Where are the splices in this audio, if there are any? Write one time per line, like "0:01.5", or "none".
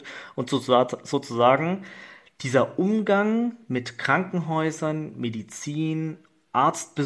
none